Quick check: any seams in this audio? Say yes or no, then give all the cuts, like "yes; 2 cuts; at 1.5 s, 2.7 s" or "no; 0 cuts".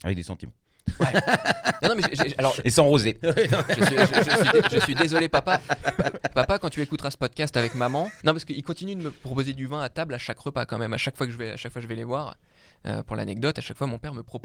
yes; 2 cuts; at 3.2 s, 8.2 s